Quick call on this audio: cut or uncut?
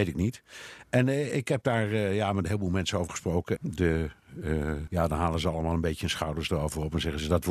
cut